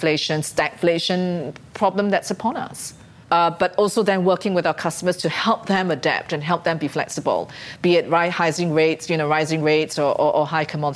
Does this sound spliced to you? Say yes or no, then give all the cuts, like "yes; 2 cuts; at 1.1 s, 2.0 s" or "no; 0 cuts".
yes; 1 cut; at 3.2 s